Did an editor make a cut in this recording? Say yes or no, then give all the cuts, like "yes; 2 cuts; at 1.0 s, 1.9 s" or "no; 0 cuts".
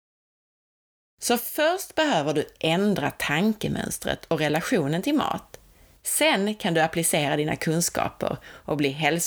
no; 0 cuts